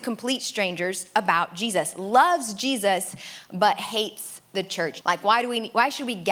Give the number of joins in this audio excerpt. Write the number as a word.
one